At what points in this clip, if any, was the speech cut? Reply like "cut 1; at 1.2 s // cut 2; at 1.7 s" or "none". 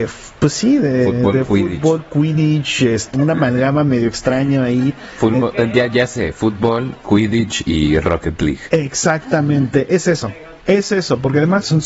cut 1; at 3.1 s

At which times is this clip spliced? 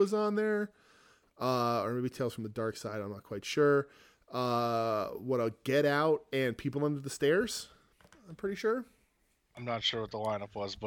none

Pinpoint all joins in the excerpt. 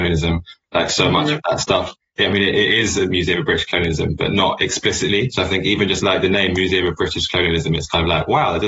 none

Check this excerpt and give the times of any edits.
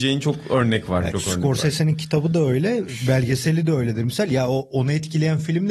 cut 1; at 1.1 s

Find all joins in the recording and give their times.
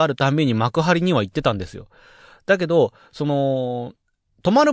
none

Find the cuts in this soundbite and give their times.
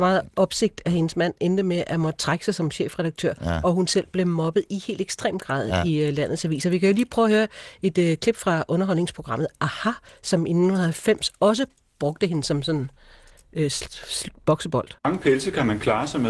cut 1; at 15.0 s

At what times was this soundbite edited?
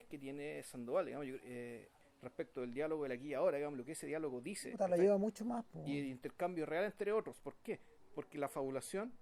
none

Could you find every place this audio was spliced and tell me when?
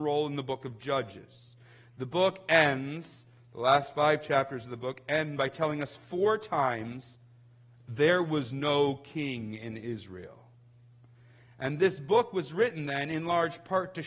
none

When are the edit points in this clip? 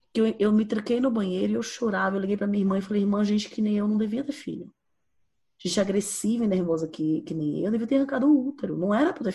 none

